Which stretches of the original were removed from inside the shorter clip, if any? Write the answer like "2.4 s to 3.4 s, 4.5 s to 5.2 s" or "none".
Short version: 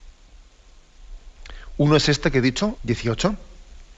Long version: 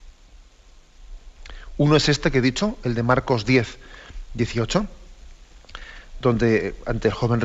2.8 s to 4.3 s